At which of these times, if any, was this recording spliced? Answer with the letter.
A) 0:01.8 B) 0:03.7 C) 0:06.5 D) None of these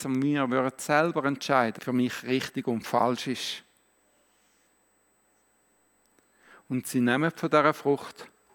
A